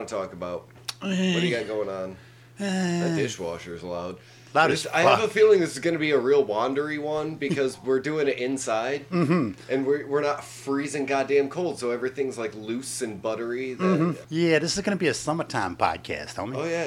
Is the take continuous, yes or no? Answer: no